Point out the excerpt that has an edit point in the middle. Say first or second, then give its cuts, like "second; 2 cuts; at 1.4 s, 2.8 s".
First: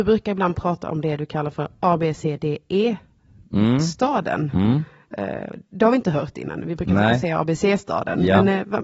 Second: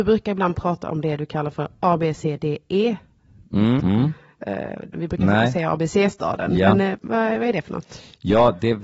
second; 3 cuts; at 3.8 s, 4.9 s, 7.0 s